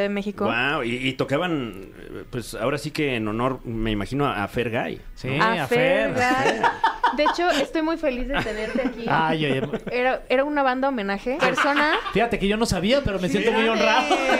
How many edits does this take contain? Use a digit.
1